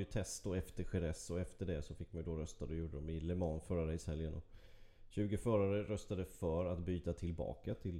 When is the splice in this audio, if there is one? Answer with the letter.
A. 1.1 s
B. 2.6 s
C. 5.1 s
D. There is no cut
D